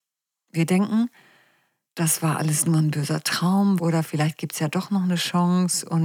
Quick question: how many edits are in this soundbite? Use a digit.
1